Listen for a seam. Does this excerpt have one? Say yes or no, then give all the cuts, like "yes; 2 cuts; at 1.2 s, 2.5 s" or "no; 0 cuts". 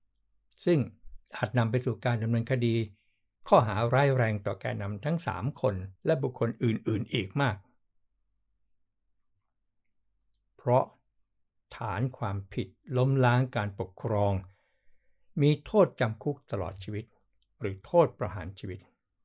yes; 2 cuts; at 1.2 s, 6.0 s